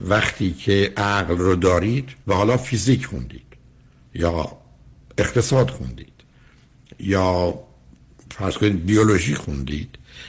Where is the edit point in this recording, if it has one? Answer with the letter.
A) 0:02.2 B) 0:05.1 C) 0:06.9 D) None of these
A